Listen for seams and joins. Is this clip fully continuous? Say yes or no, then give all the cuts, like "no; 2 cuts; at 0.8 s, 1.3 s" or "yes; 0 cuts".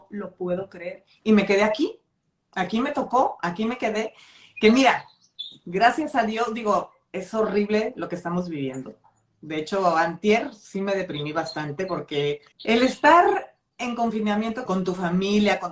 no; 2 cuts; at 12.5 s, 14.7 s